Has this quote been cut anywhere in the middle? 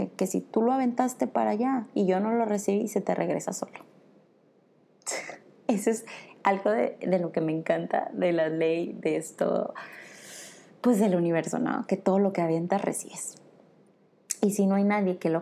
no; 0 cuts

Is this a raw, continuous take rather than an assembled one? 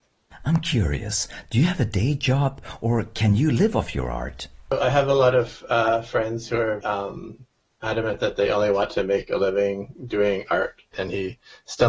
no; 2 cuts; at 6.8 s, 10.9 s

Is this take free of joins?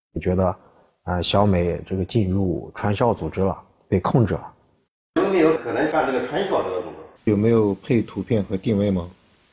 no; 1 cut; at 7.2 s

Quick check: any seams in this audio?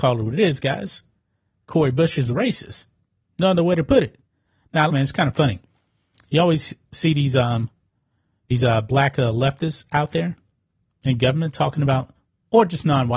yes; 1 cut; at 4.9 s

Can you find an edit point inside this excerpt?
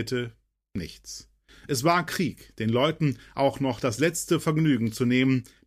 no; 0 cuts

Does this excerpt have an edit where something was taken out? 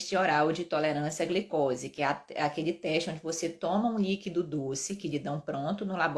no; 0 cuts

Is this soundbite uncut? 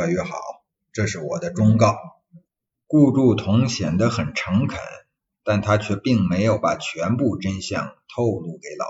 yes; 0 cuts

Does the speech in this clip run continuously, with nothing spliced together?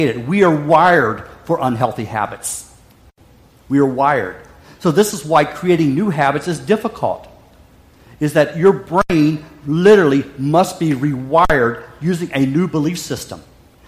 yes; 0 cuts

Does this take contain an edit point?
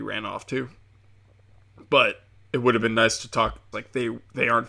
yes; 1 cut; at 3.7 s

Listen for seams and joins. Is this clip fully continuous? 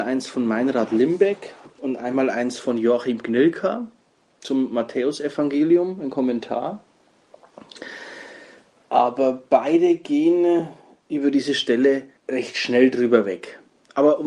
no; 1 cut; at 12.2 s

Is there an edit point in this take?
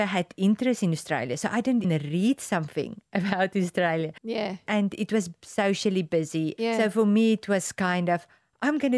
yes; 2 cuts; at 1.8 s, 4.2 s

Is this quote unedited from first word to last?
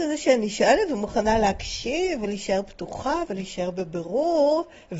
yes; 0 cuts

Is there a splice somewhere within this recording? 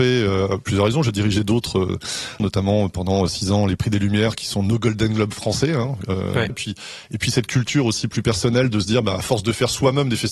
yes; 2 cuts; at 2.4 s, 6.5 s

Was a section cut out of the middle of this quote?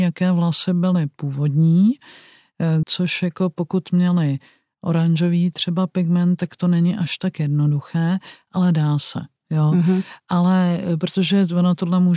yes; 1 cut; at 2.8 s

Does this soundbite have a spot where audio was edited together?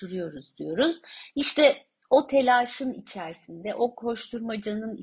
no; 0 cuts

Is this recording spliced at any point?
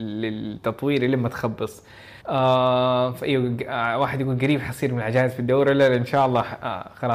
yes; 1 cut; at 2.2 s

